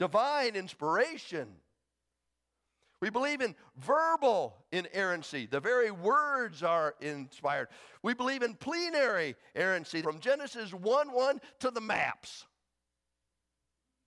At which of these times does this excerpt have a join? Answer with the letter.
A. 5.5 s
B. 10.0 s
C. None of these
B